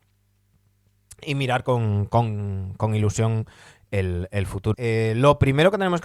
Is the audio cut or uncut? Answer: cut